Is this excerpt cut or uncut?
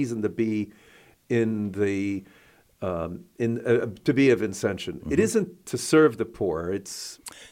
uncut